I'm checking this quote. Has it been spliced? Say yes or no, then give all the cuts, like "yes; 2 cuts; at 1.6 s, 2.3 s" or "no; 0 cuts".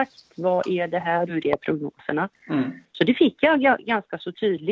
yes; 1 cut; at 1.3 s